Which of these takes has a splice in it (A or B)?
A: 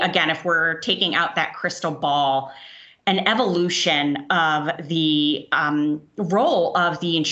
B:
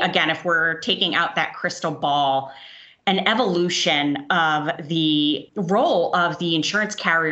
B